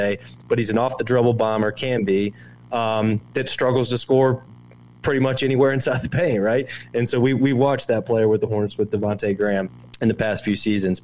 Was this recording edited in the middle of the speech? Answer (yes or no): no